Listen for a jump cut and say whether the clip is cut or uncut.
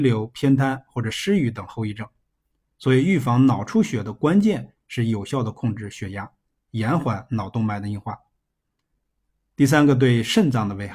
uncut